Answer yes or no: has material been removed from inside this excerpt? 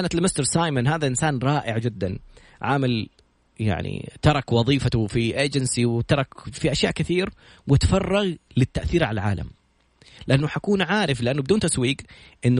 yes